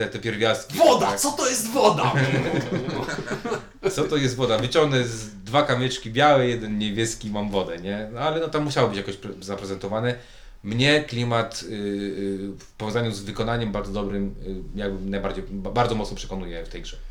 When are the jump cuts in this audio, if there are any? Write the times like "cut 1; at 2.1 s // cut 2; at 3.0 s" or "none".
none

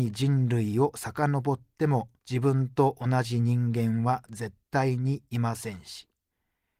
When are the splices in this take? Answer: cut 1; at 2.2 s

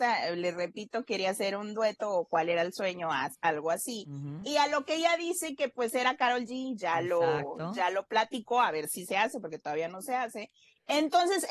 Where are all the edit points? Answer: none

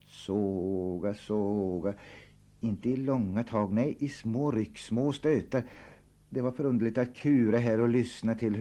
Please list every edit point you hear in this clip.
none

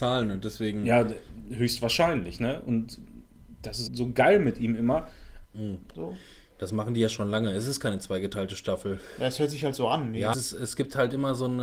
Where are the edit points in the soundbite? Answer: cut 1; at 3.9 s // cut 2; at 5.4 s // cut 3; at 10.3 s

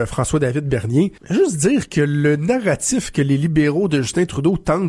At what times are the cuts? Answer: cut 1; at 1.2 s

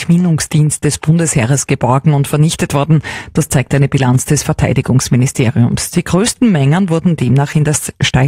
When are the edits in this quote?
none

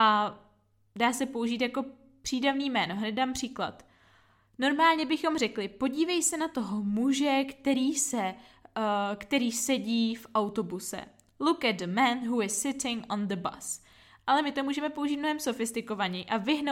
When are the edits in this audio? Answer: none

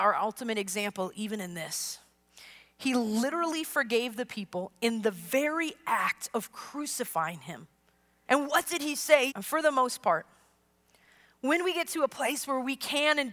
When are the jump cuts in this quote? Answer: cut 1; at 8.2 s // cut 2; at 9.3 s

